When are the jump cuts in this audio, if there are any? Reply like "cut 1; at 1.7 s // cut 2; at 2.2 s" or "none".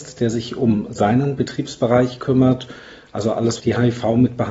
cut 1; at 3.6 s